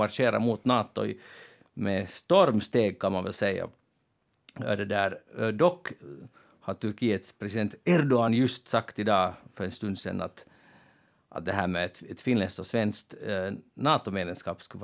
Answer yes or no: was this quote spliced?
no